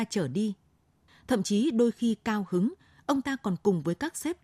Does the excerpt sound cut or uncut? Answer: cut